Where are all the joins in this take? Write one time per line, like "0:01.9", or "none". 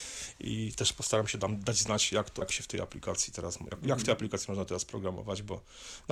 0:02.4